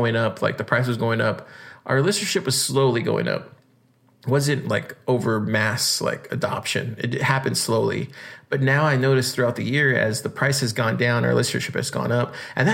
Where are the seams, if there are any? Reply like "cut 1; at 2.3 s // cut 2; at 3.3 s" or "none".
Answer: none